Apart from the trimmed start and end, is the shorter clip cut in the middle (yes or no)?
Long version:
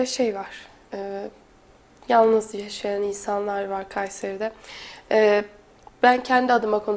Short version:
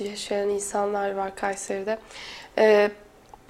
no